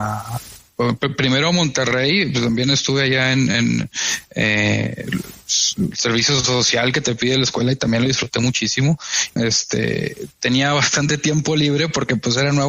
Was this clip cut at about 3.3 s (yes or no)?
no